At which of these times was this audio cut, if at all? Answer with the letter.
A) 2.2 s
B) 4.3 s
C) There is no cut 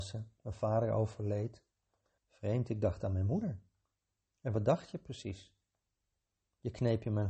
A